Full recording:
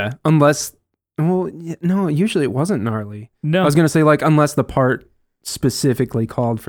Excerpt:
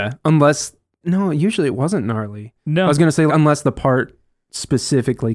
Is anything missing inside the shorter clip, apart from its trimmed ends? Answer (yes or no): yes